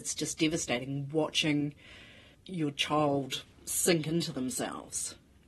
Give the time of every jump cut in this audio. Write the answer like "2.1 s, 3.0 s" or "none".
3.5 s